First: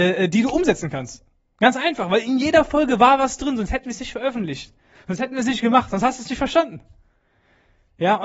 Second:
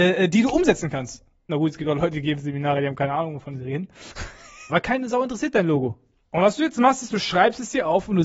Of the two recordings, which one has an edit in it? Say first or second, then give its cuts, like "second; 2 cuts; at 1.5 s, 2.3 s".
second; 3 cuts; at 1.5 s, 4.7 s, 6.2 s